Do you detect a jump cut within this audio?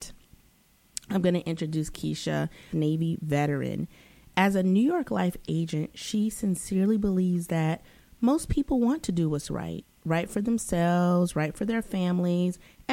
yes; 1 cut; at 2.7 s

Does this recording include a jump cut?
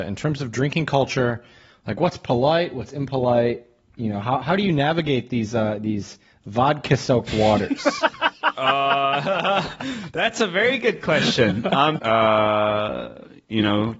yes; 1 cut; at 12.0 s

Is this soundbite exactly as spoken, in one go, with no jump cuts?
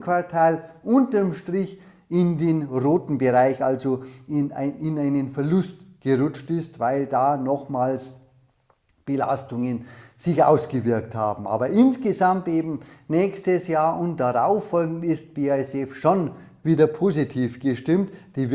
yes; 0 cuts

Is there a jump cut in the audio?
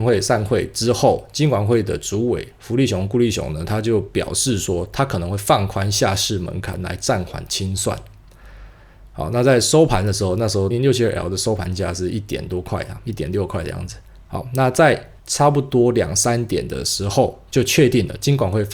yes; 2 cuts; at 10.7 s, 15.2 s

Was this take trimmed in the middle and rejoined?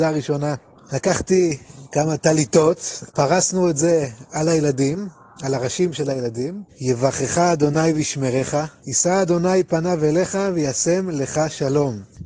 yes; 3 cuts; at 3.1 s, 6.7 s, 8.8 s

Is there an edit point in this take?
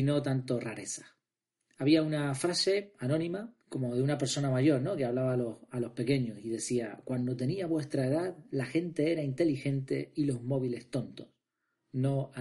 yes; 1 cut; at 3.6 s

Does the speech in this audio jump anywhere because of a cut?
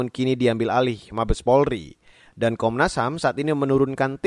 no; 0 cuts

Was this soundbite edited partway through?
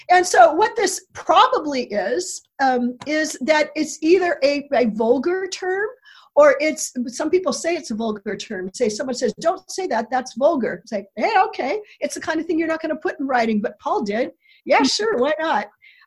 no; 0 cuts

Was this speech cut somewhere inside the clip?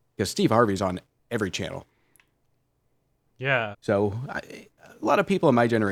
yes; 1 cut; at 3.7 s

